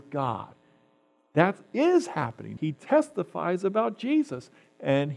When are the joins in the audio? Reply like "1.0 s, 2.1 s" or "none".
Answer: 2.6 s